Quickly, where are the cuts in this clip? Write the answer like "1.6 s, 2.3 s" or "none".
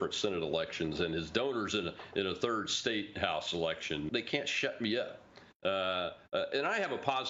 4.1 s, 5.6 s